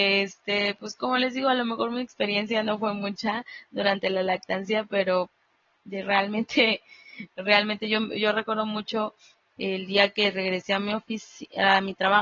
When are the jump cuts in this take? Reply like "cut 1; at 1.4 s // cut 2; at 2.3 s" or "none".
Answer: none